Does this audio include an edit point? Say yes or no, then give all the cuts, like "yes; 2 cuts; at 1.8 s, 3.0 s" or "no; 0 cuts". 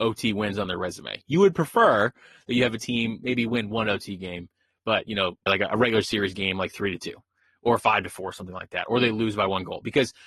yes; 1 cut; at 5.5 s